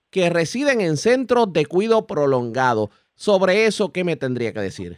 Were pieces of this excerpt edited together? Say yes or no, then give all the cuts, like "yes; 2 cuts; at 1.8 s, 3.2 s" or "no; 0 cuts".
no; 0 cuts